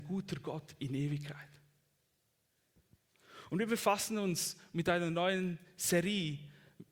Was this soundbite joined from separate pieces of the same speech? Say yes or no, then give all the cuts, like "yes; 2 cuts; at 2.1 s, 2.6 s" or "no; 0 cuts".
no; 0 cuts